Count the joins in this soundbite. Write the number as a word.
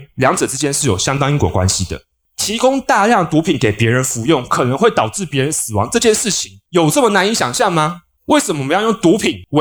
zero